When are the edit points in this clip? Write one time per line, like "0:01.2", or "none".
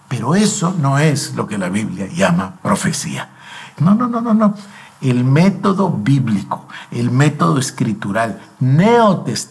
0:03.8